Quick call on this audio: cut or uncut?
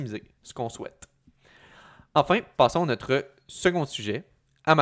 uncut